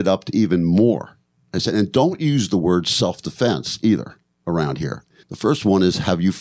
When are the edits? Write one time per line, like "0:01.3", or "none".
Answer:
0:05.2